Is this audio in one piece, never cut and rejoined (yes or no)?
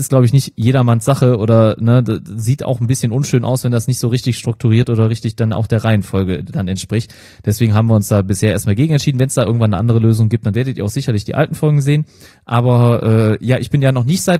yes